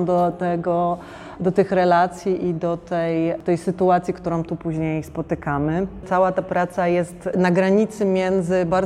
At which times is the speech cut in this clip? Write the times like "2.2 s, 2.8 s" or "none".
none

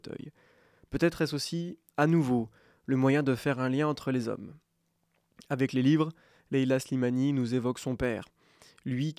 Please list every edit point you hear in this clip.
none

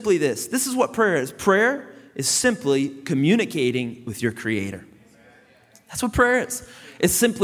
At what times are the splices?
none

